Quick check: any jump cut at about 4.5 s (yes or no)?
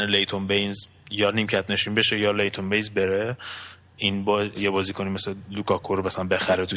yes